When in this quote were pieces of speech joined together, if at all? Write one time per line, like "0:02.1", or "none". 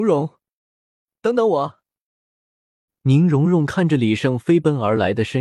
0:02.9